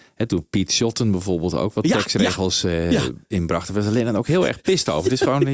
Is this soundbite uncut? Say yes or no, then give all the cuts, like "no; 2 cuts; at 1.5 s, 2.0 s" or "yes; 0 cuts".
yes; 0 cuts